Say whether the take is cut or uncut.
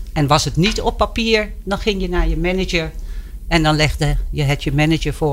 uncut